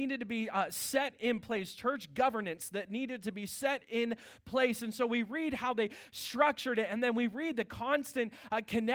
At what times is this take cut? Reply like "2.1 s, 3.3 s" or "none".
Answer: none